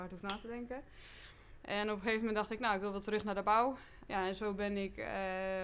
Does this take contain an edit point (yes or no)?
yes